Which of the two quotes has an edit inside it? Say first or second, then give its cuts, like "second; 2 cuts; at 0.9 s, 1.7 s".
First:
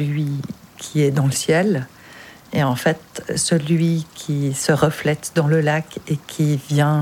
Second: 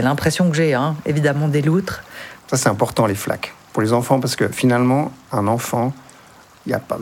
second; 1 cut; at 2.4 s